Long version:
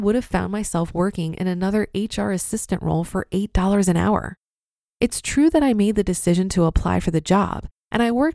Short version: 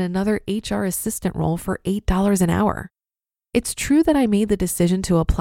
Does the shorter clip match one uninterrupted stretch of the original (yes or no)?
yes